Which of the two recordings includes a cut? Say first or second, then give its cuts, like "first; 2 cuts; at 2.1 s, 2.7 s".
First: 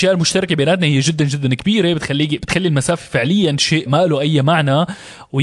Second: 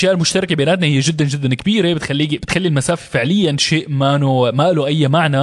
first; 1 cut; at 3.9 s